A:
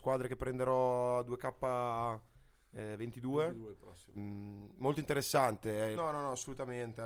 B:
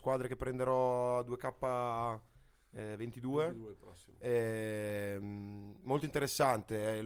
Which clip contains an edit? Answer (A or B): A